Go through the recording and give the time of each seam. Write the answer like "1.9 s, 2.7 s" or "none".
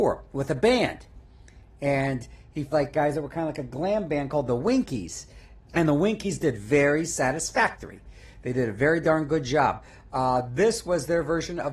2.7 s, 5.7 s